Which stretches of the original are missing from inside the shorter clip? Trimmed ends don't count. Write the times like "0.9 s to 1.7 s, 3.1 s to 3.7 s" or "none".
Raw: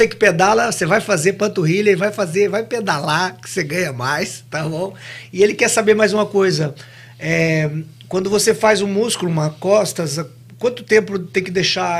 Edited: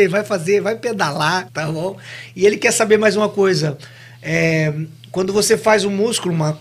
3.4 s to 4.4 s

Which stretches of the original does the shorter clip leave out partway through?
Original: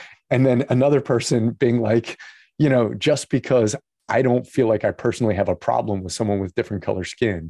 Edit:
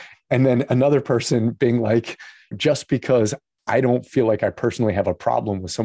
2.5 s to 2.9 s

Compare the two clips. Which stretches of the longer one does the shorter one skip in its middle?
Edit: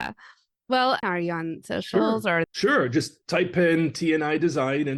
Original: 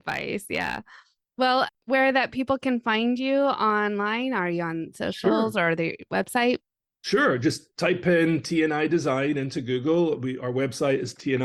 1.7 s to 4.3 s, 5.7 s to 6.9 s

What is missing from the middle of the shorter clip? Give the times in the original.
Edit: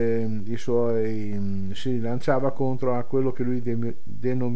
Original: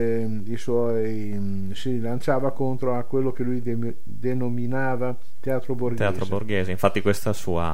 none

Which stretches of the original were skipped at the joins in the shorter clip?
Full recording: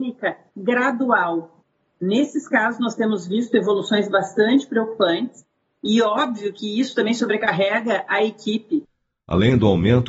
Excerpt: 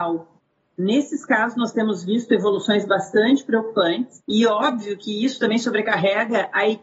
5.5 s to 5.8 s

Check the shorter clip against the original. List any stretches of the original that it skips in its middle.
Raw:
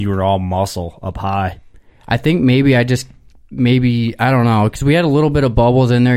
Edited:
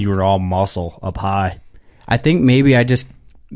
none

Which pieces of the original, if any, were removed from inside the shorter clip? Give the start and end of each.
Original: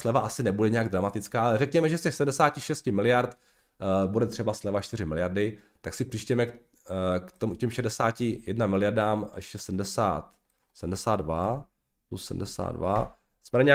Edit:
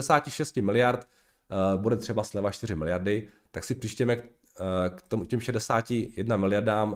none

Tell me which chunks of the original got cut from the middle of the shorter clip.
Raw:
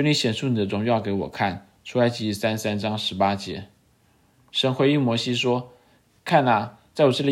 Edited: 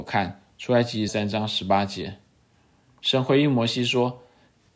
2.3 s to 2.6 s

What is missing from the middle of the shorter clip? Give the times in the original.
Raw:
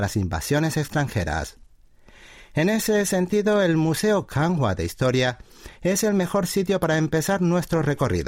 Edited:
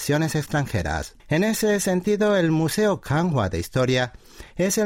1.6 s to 2.5 s

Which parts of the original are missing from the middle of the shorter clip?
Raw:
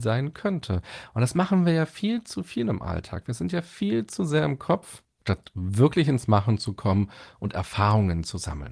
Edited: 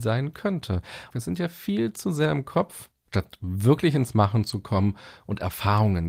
1.1 s to 3.2 s

